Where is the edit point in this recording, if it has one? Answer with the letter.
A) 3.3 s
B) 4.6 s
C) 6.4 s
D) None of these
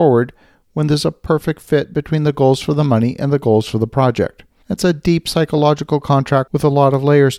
B